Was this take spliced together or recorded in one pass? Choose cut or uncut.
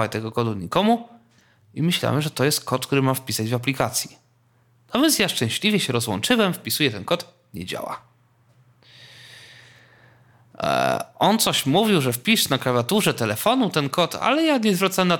uncut